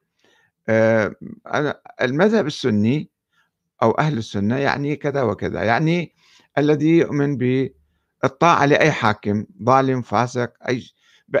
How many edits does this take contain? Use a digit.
1